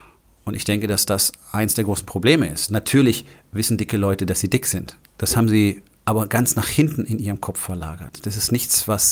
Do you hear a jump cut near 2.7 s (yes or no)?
yes